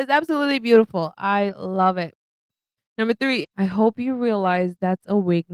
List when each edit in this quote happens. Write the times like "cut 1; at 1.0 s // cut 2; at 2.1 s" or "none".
cut 1; at 3.4 s